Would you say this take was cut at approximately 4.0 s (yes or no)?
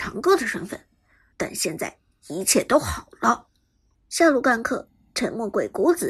yes